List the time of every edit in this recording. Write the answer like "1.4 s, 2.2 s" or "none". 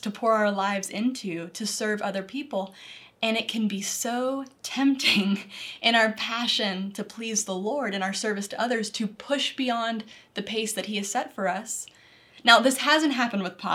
12.3 s

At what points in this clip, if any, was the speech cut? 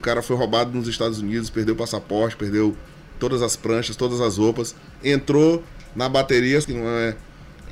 5.0 s, 6.6 s

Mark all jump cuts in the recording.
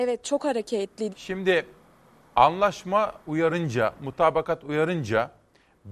1.1 s, 3.2 s

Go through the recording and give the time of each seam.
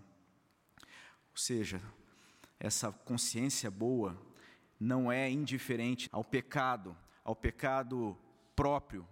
6.1 s

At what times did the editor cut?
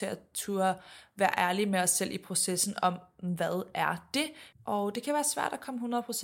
4.5 s

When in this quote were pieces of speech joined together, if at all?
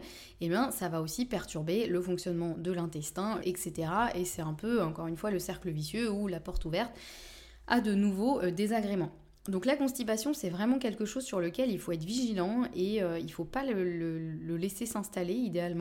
3.4 s

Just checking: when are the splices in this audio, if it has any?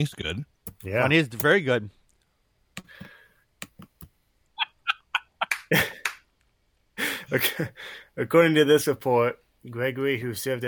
4.5 s

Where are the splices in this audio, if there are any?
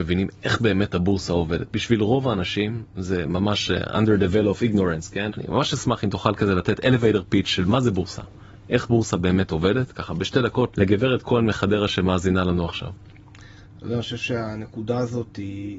5.3 s

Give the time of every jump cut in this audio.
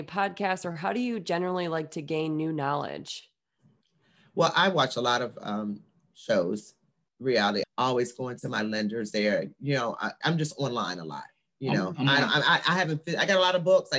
7.6 s, 10.2 s

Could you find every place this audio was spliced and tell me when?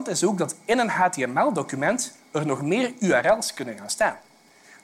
none

